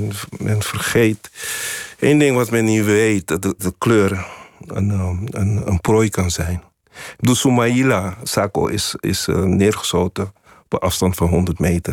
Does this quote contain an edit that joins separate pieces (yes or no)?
yes